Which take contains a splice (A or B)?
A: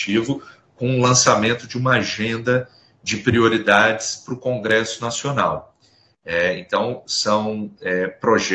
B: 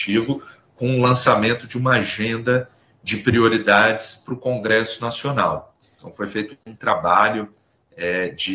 B